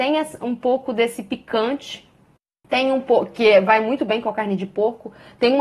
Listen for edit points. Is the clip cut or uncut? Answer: uncut